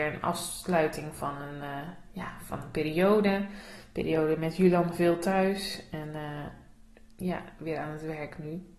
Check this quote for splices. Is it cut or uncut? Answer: uncut